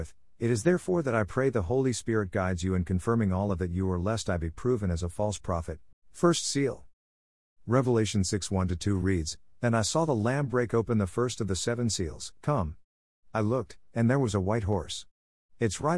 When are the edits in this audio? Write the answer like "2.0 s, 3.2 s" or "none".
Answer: 5.9 s, 12.4 s